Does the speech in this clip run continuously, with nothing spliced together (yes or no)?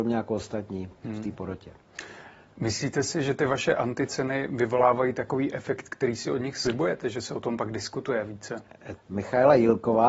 no